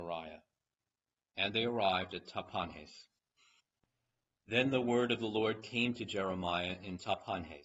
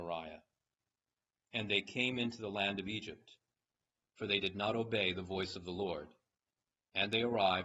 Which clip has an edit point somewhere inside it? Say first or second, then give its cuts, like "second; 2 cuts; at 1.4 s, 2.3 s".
first; 1 cut; at 1.2 s